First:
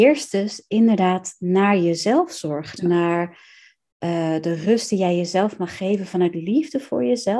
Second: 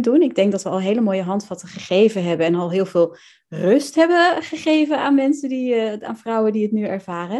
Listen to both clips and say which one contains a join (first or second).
first